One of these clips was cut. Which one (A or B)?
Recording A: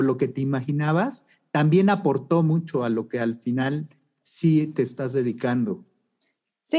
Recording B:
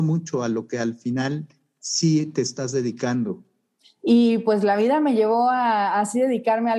B